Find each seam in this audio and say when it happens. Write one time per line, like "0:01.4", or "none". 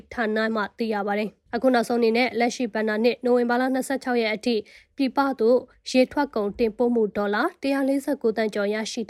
0:01.5